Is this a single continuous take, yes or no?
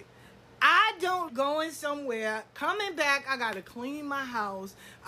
no